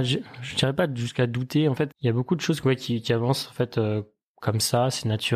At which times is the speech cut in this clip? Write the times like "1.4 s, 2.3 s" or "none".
1.9 s